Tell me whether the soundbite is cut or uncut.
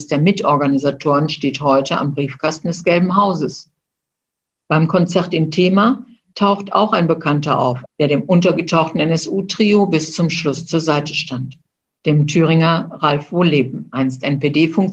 cut